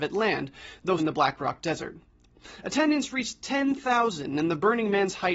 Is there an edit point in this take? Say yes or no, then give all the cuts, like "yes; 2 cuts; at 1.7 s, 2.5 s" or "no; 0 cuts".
yes; 1 cut; at 1.0 s